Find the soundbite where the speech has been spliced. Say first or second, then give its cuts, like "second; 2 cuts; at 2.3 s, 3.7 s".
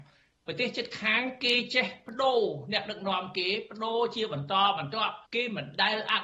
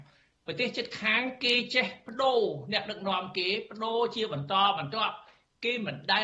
first; 1 cut; at 5.3 s